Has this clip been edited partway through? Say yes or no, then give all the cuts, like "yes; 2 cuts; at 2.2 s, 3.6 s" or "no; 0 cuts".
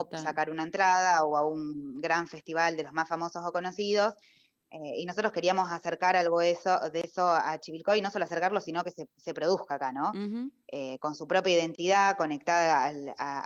no; 0 cuts